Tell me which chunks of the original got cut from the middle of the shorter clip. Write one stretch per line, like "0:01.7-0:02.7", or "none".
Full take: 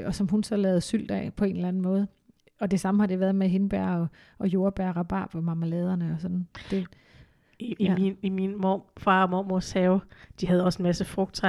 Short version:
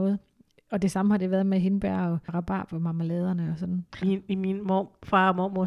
0:04.2-0:04.9
0:06.6-0:08.0